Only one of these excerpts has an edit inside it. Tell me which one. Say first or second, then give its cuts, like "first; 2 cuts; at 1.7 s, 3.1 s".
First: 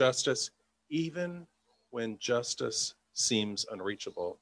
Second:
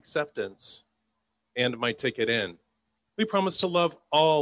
second; 1 cut; at 3.1 s